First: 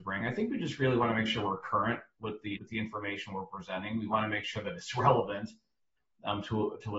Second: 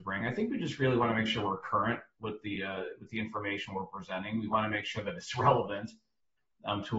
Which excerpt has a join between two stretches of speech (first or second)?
first